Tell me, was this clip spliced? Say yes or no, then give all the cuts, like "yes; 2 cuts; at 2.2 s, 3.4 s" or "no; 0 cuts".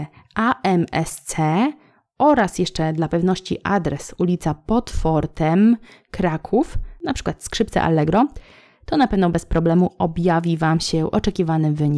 no; 0 cuts